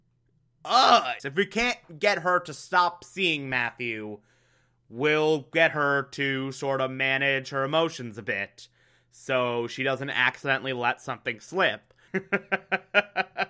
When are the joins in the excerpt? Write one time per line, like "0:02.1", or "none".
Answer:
0:01.2
0:12.1